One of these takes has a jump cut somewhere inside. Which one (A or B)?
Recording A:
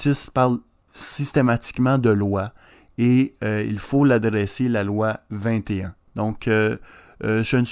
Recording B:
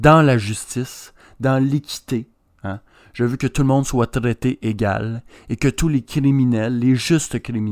A